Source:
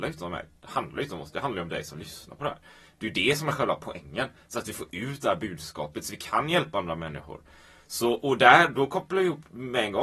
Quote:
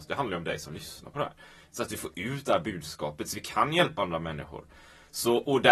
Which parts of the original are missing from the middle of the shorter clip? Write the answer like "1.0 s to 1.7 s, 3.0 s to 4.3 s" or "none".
3.0 s to 4.5 s